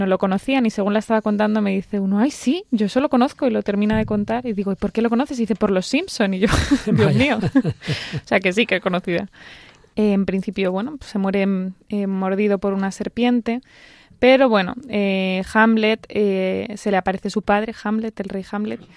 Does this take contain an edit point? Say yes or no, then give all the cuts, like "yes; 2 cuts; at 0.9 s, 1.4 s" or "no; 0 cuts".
yes; 1 cut; at 9.9 s